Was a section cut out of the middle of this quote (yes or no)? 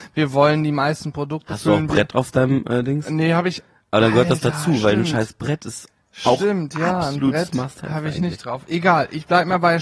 no